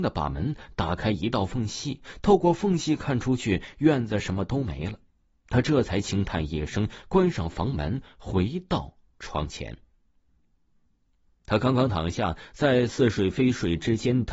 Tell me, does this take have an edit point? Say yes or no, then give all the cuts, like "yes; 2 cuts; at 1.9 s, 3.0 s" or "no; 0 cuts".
no; 0 cuts